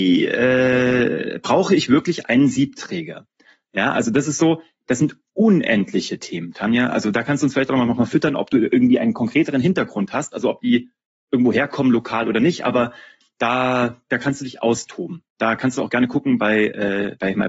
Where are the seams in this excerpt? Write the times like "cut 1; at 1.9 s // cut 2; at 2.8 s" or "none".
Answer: none